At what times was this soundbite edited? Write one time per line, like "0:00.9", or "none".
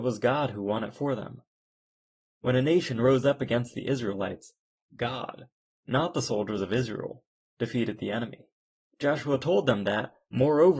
0:08.8